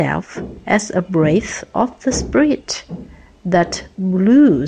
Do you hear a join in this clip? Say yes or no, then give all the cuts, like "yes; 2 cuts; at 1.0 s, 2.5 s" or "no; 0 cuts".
no; 0 cuts